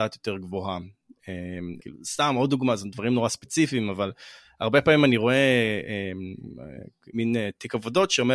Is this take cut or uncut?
cut